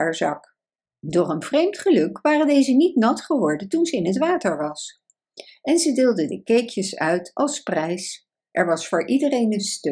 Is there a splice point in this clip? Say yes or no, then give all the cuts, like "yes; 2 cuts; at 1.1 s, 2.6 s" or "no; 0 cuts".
no; 0 cuts